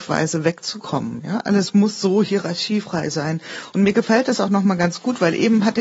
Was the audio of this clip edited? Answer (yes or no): no